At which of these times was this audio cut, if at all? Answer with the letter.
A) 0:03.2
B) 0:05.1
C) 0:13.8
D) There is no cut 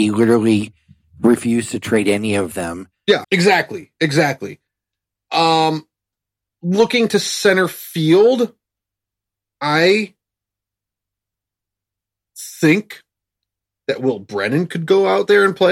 A